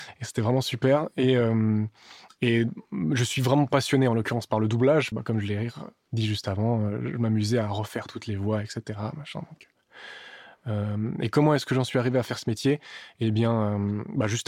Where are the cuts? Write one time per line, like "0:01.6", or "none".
0:05.1